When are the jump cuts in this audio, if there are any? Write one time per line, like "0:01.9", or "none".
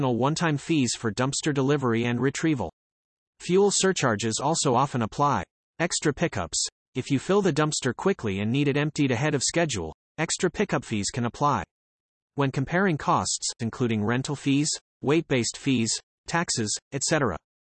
0:13.6
0:16.2